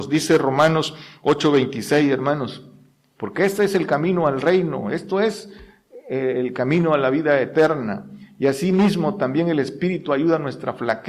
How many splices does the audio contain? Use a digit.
0